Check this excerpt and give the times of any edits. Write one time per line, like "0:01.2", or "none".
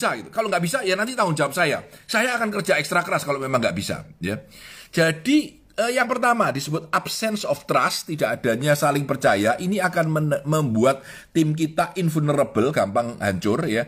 none